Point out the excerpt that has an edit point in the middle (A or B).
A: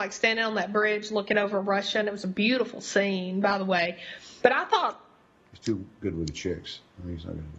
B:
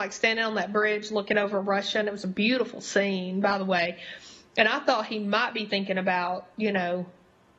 A